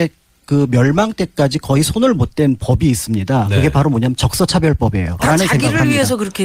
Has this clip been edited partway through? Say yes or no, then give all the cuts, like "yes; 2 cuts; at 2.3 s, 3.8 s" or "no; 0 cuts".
yes; 1 cut; at 5.2 s